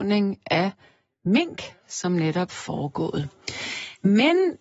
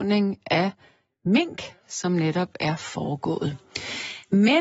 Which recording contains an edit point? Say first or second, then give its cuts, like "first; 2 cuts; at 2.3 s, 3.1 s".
first; 1 cut; at 2.5 s